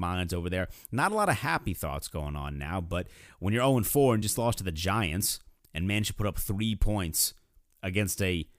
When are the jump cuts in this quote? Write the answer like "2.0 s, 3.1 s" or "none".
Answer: none